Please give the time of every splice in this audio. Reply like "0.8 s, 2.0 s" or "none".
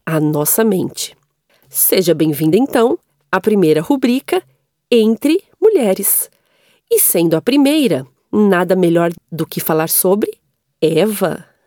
none